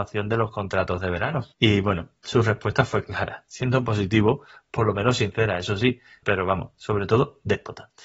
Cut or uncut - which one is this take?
cut